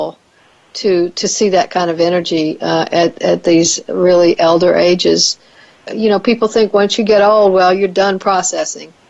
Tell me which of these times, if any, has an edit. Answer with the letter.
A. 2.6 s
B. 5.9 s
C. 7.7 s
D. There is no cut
B